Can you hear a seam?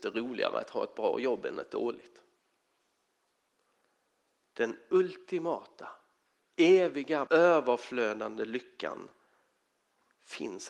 yes; 1 cut; at 7.3 s

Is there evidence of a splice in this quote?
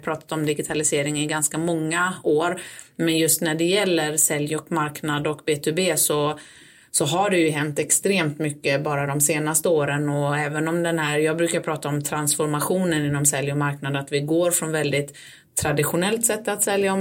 no; 0 cuts

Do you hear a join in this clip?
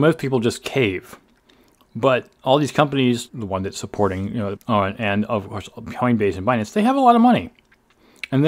yes; 2 cuts; at 3.3 s, 4.6 s

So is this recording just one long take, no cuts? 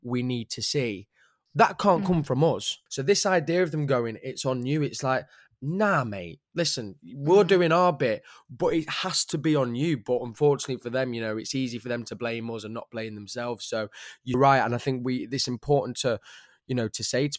no; 2 cuts; at 2.9 s, 14.3 s

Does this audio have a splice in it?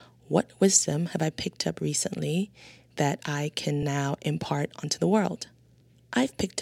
no; 0 cuts

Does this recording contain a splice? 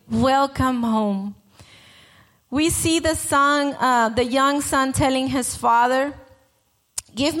no; 0 cuts

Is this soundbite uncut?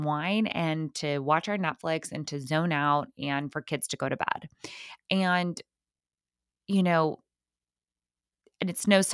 yes; 0 cuts

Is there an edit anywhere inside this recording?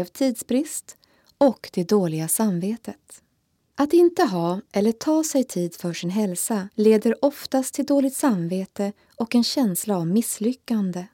yes; 2 cuts; at 3.7 s, 6.7 s

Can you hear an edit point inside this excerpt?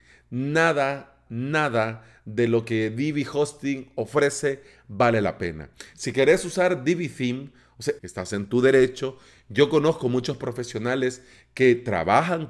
yes; 2 cuts; at 1.3 s, 8.0 s

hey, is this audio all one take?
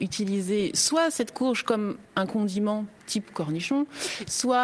no; 1 cut; at 3.0 s

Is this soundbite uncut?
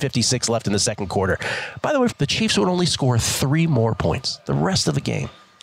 no; 1 cut; at 2.1 s

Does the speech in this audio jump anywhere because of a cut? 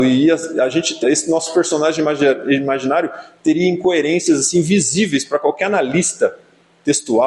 yes; 1 cut; at 1.0 s

